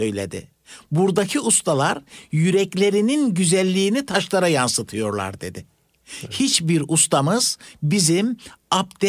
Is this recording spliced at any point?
no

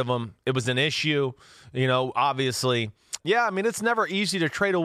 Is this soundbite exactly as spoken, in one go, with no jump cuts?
no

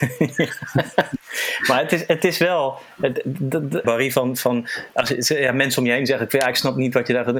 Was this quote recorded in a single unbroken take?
no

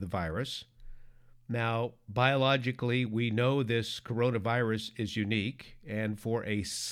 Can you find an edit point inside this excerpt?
no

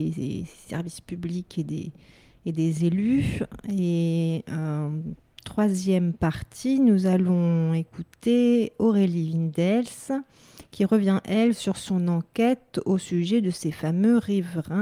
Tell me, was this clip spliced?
no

